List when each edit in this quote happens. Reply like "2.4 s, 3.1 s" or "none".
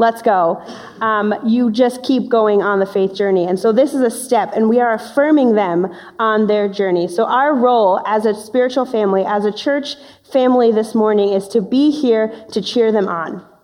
none